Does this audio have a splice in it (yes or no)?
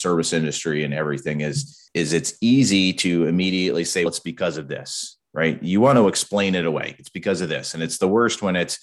yes